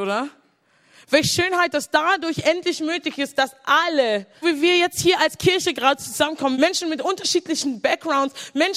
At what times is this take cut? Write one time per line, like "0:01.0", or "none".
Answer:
0:04.4
0:06.5